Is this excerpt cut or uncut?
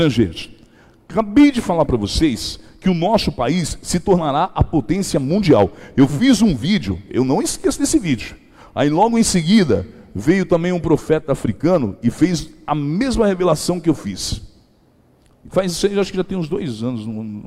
uncut